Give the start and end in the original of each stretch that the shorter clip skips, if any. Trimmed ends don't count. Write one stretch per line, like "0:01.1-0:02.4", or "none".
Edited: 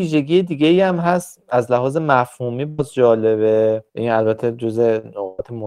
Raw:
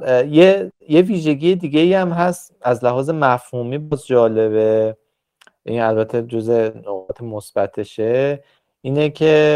0:05.0-0:05.6